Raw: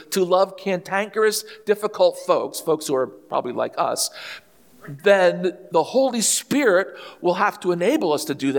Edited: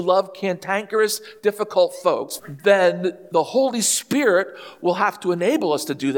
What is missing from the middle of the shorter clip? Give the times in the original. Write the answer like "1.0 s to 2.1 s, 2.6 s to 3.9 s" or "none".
2.6 s to 4.8 s